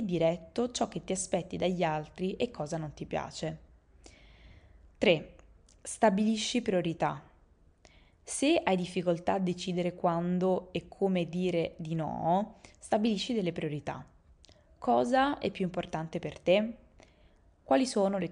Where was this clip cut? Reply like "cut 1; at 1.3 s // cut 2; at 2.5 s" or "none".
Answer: none